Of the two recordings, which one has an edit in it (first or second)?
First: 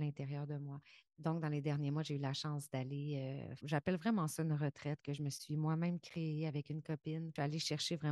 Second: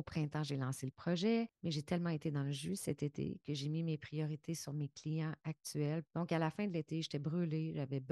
first